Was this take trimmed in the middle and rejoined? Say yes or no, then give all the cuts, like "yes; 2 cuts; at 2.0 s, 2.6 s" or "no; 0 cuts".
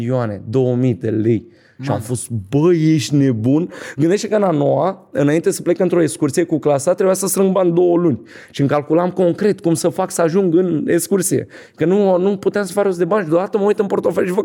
no; 0 cuts